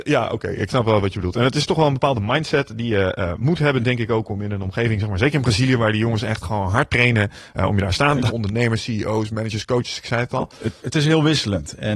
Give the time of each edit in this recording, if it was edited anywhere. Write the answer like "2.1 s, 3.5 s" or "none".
8.3 s, 10.8 s